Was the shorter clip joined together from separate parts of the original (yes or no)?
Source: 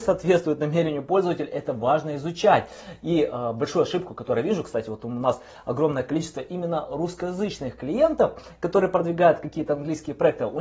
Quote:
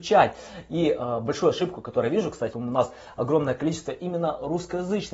yes